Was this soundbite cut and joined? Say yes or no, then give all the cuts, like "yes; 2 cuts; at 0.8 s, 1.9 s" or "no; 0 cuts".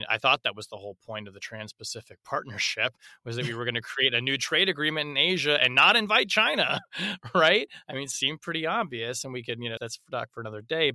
yes; 1 cut; at 9.8 s